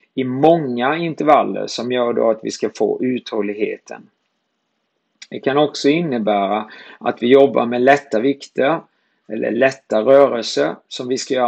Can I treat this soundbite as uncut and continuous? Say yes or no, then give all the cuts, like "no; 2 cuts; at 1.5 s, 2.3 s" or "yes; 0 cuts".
yes; 0 cuts